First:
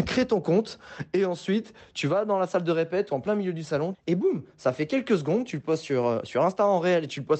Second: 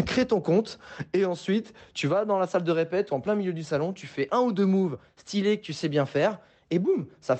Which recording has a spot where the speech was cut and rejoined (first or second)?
first